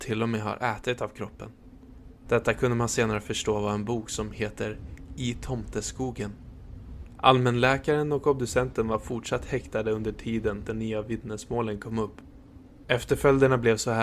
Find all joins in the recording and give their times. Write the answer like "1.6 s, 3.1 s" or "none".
2.3 s, 12.8 s